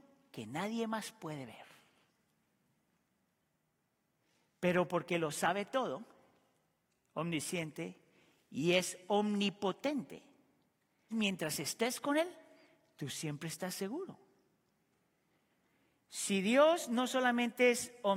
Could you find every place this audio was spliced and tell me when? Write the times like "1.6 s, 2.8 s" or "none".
11.1 s